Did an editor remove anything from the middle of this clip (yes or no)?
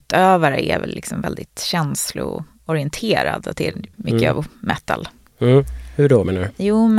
yes